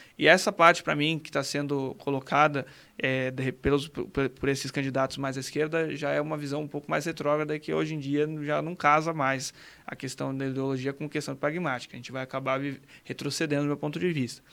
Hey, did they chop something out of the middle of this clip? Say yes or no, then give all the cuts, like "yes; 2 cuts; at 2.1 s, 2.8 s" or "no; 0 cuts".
no; 0 cuts